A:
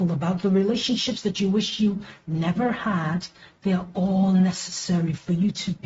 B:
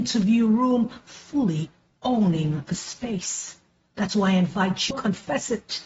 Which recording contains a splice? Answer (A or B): B